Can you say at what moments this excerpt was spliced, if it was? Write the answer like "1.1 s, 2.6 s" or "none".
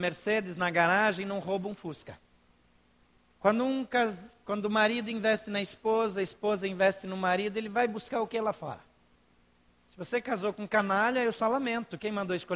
none